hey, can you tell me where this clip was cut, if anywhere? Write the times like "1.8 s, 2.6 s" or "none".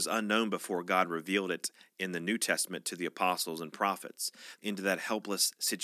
4.6 s